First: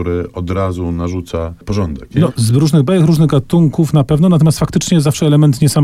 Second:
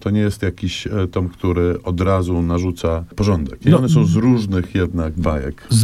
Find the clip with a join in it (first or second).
first